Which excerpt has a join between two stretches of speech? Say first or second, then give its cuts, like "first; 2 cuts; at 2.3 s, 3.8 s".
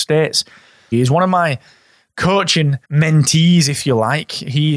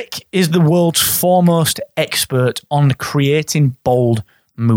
first; 2 cuts; at 0.9 s, 2.8 s